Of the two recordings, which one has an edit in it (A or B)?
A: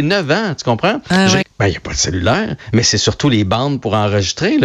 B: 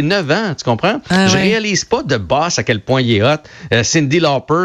A